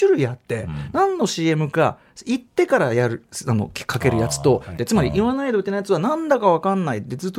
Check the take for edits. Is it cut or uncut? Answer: cut